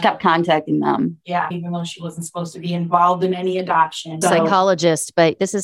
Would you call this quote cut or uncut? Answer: cut